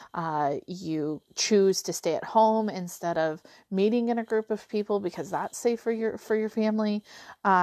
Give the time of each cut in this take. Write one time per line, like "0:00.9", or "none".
0:01.3